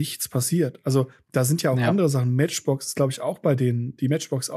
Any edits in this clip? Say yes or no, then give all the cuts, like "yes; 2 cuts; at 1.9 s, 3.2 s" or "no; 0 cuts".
no; 0 cuts